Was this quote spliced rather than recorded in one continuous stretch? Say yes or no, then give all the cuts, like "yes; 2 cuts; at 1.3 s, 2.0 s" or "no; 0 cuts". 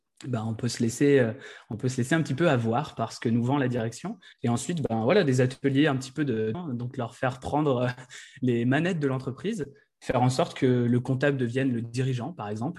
yes; 2 cuts; at 4.3 s, 6.5 s